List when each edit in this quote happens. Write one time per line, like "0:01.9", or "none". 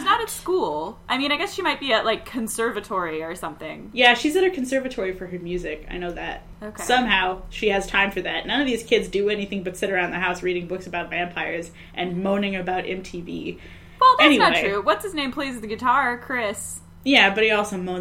none